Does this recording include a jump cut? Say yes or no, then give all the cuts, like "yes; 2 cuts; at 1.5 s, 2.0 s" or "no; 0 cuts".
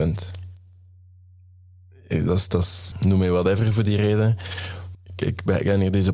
yes; 2 cuts; at 2.9 s, 4.9 s